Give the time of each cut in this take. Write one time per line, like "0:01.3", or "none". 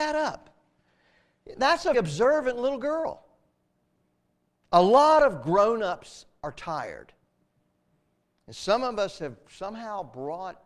0:01.9